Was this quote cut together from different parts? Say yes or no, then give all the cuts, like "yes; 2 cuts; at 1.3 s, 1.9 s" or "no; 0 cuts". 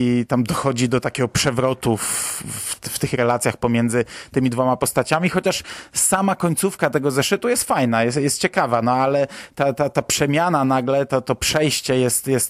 no; 0 cuts